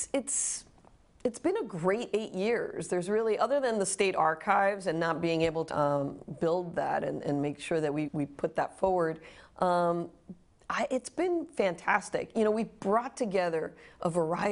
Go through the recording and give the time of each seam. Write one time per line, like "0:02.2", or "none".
0:05.7
0:08.1